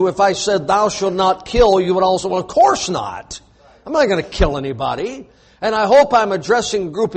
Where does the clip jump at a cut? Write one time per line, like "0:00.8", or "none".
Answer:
none